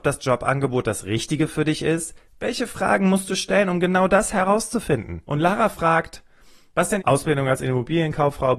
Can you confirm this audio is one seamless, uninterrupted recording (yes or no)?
no